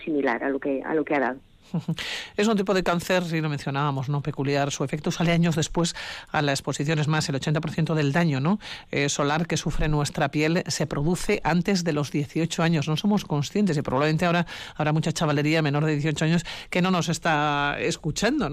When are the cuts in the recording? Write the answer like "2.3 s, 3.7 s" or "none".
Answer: none

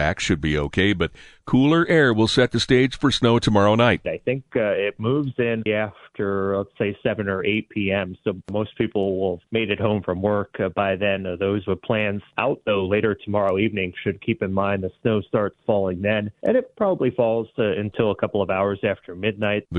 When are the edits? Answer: 5.7 s

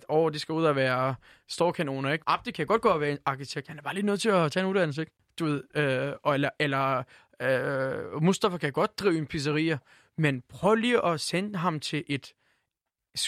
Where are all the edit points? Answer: 2.2 s

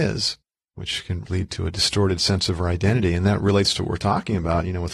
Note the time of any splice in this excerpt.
1.2 s

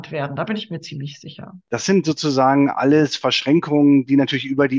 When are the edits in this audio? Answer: 1.7 s

